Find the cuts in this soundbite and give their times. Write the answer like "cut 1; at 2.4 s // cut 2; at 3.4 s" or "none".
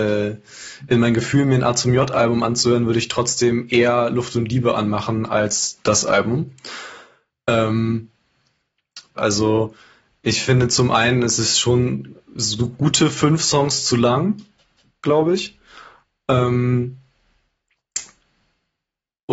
cut 1; at 9.2 s